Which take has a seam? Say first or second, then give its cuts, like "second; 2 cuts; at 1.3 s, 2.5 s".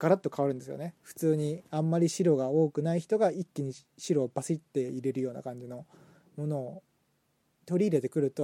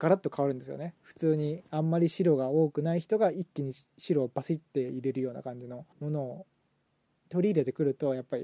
second; 1 cut; at 5.9 s